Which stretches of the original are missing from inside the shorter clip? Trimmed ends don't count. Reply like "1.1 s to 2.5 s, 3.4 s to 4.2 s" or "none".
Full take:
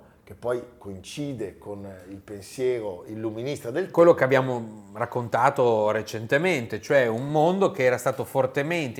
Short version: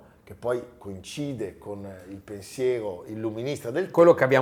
none